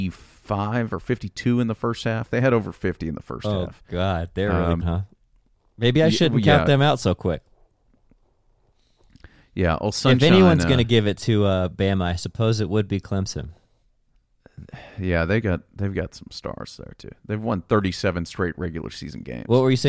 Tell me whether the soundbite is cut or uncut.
cut